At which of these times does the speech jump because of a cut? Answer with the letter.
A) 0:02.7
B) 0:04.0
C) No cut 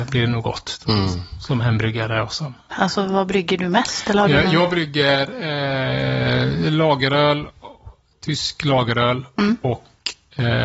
A